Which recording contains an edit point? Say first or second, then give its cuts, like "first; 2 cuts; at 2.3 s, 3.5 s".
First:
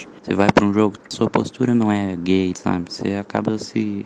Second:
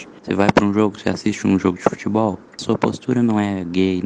first; 2 cuts; at 1.0 s, 2.5 s